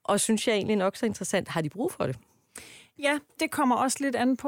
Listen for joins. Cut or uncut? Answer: cut